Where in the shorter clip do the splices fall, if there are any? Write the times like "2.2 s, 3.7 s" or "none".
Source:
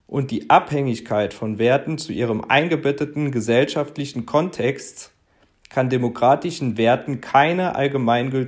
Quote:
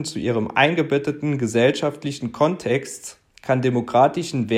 3.3 s